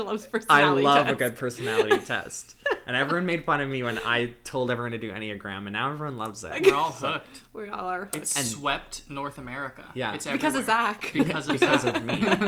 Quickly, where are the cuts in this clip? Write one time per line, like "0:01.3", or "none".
none

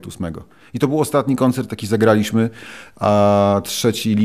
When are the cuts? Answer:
none

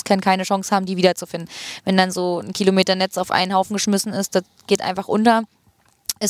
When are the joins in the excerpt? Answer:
none

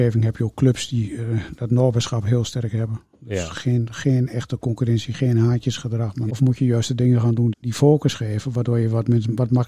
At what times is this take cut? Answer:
0:06.3
0:07.5

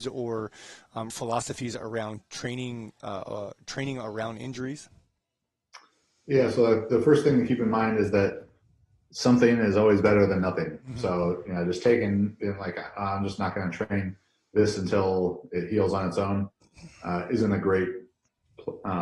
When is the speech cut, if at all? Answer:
0:01.1

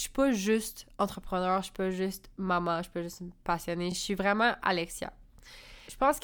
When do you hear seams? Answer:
none

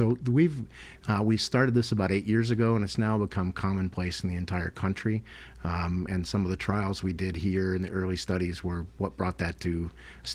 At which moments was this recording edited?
none

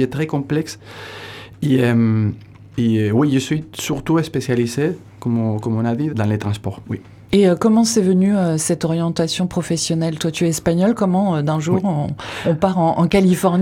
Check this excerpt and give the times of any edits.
0:06.1

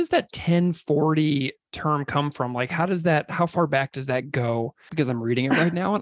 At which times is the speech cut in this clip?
0:04.9

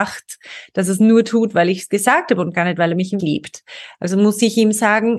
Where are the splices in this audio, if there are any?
0:03.2

